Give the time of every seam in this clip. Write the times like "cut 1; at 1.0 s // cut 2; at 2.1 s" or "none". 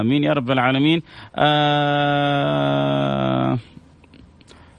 none